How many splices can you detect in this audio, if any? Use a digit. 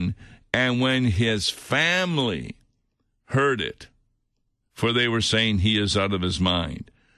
1